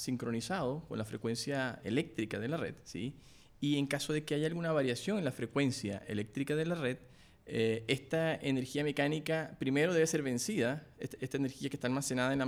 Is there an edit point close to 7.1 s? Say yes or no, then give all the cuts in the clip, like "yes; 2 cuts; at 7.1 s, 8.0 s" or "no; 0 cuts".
no; 0 cuts